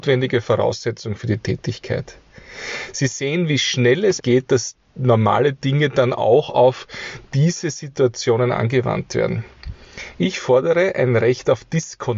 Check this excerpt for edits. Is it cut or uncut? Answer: cut